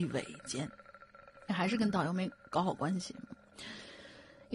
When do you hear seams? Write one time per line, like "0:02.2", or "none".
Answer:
none